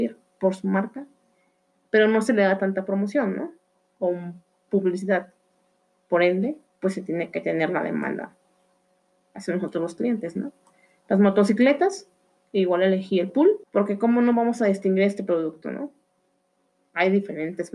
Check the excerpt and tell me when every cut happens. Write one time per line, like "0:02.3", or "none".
0:06.7
0:13.6